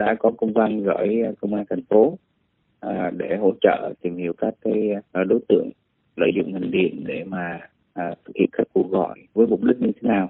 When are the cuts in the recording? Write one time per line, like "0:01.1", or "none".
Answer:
none